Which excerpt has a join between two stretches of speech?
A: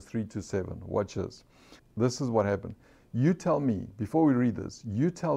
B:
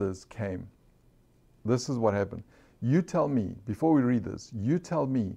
A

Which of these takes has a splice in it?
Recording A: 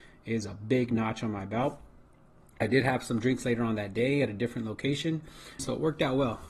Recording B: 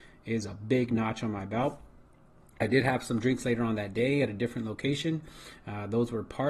A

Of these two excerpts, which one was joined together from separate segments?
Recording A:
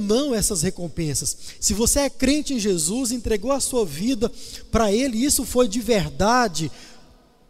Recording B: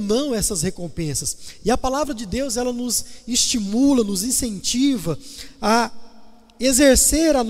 A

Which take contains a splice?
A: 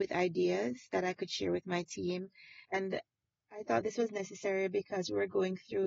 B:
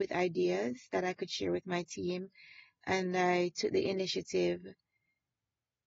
A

